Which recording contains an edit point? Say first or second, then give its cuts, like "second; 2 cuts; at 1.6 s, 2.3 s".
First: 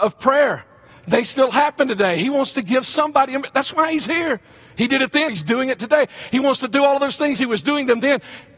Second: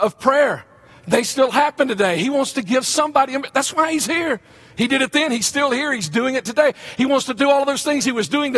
first; 1 cut; at 5.3 s